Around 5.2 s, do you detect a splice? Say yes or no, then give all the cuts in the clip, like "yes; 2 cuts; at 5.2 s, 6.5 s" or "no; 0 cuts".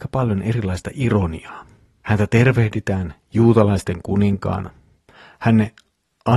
no; 1 cut; at 2.0 s